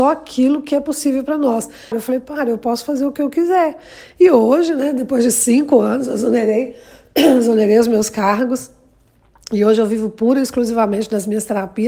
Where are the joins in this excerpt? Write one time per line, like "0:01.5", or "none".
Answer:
0:01.9